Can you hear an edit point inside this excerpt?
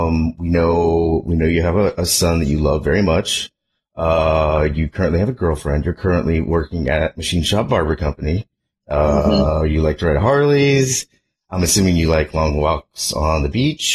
no; 0 cuts

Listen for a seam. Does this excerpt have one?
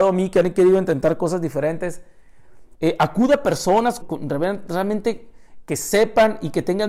yes; 2 cuts; at 2.7 s, 4.0 s

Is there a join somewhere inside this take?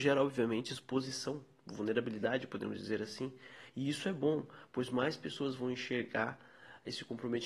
no; 0 cuts

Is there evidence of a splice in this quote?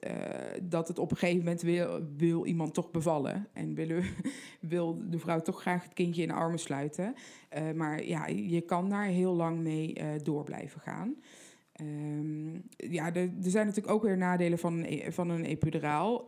yes; 1 cut; at 12.7 s

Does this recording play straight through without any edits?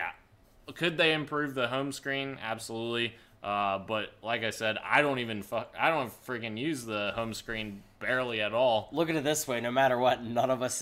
yes; 0 cuts

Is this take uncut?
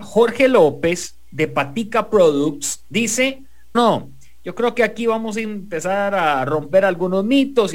no; 1 cut; at 3.7 s

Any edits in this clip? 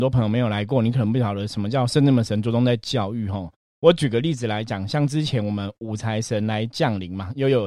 no; 0 cuts

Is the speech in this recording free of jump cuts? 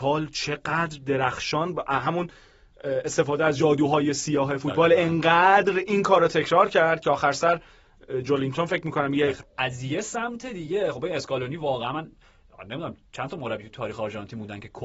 no; 1 cut; at 9.4 s

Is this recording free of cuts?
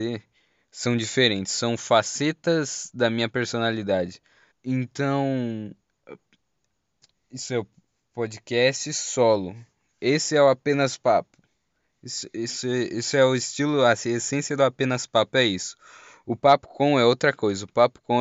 no; 1 cut; at 4.5 s

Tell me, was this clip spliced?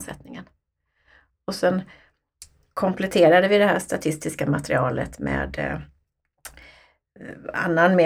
no; 0 cuts

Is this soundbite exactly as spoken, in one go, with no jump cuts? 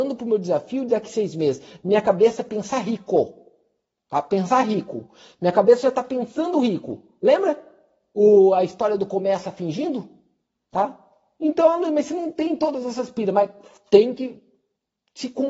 yes; 0 cuts

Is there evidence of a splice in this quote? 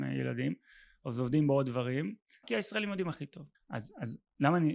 yes; 2 cuts; at 2.4 s, 3.5 s

